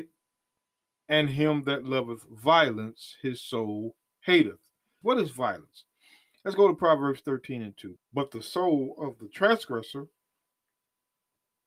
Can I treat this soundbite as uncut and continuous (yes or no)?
no